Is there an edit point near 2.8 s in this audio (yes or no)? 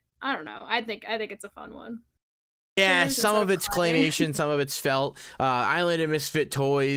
yes